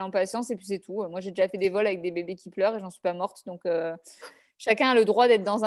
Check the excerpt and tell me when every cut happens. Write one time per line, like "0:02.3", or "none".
none